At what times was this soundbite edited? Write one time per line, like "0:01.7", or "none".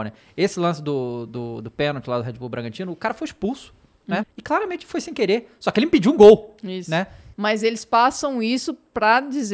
0:04.2
0:07.3